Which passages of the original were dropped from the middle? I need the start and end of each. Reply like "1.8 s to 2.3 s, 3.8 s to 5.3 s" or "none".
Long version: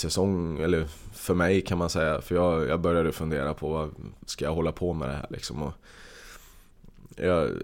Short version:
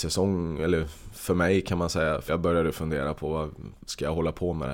2.3 s to 2.7 s